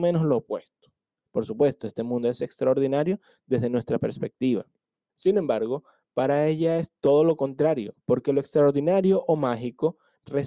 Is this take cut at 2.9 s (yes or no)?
no